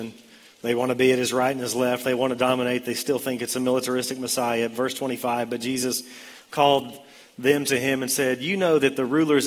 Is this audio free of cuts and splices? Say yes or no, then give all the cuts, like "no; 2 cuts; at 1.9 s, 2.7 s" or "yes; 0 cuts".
yes; 0 cuts